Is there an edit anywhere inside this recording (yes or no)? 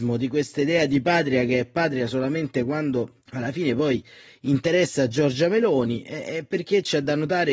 yes